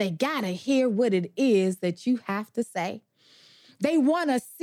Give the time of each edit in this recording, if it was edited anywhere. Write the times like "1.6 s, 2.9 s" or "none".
none